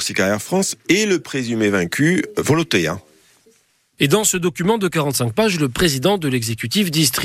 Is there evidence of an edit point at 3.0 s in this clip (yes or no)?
no